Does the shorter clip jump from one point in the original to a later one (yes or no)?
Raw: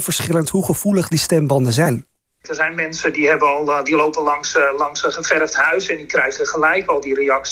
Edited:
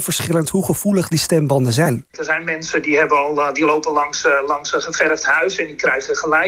yes